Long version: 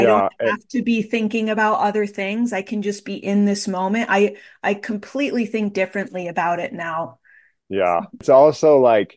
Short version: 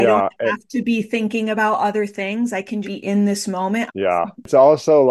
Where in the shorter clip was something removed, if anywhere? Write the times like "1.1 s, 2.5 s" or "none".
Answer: 2.8 s, 3.9 s